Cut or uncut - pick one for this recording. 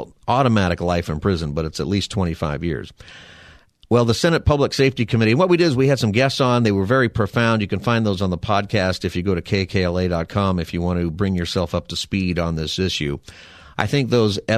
uncut